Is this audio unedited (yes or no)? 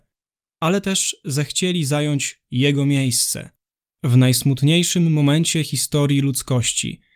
yes